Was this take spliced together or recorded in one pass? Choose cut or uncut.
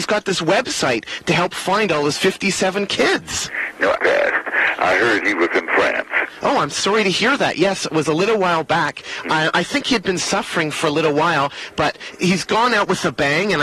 cut